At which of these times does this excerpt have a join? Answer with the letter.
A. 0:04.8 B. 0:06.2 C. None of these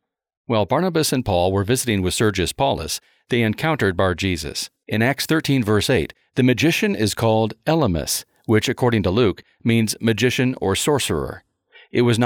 A